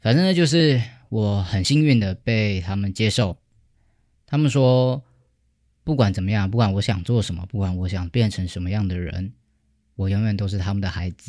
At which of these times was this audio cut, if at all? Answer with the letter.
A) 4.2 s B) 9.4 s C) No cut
C